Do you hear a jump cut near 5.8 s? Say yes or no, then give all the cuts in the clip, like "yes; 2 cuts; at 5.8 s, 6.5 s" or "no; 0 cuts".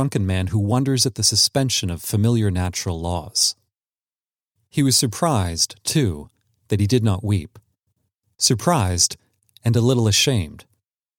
no; 0 cuts